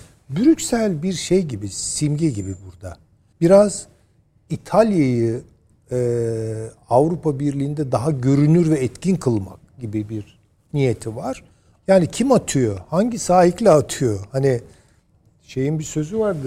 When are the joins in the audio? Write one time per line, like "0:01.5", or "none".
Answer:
0:03.3
0:11.8